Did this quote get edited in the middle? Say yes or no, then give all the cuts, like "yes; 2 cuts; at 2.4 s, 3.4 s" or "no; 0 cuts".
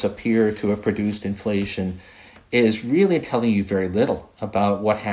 no; 0 cuts